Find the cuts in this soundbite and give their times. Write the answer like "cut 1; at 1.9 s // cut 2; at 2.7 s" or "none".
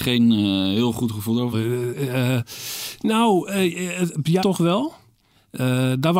cut 1; at 1.5 s // cut 2; at 4.4 s